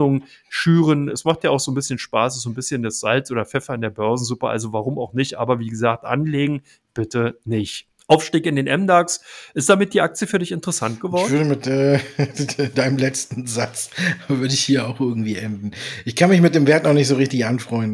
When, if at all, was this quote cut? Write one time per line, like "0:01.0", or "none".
0:08.0